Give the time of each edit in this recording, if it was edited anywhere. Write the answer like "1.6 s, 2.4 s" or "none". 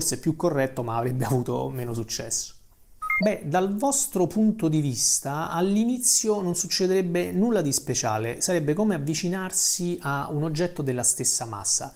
3.2 s

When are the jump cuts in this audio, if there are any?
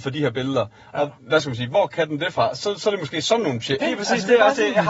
1.2 s, 3.8 s

